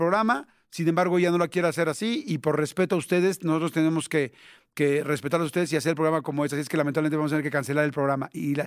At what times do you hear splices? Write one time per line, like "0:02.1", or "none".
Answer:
none